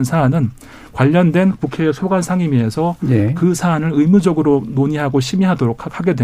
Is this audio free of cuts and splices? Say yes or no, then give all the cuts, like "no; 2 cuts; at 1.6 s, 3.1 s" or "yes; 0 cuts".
yes; 0 cuts